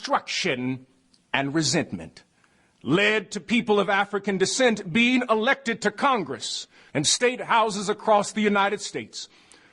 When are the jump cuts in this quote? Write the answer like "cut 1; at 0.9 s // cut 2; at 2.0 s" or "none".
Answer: cut 1; at 6.9 s

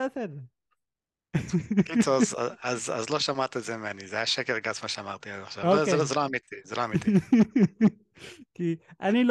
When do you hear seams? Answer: none

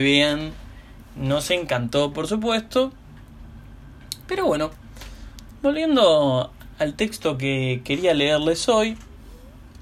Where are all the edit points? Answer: none

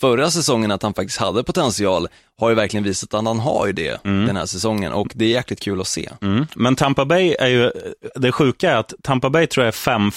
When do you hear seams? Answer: none

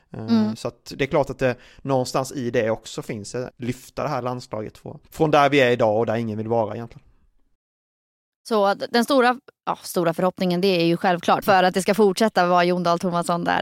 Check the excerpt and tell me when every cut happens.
cut 1; at 3.5 s // cut 2; at 5.1 s // cut 3; at 11.4 s

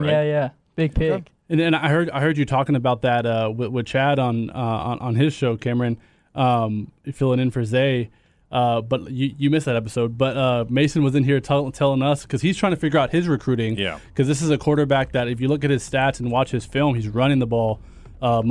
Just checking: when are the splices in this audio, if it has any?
none

